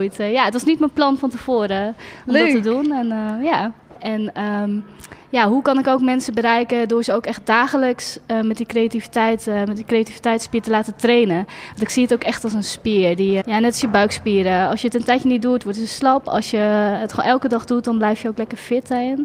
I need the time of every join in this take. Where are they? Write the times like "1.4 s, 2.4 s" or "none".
4.0 s, 13.4 s